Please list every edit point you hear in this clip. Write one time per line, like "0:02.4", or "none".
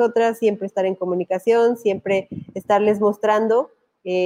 none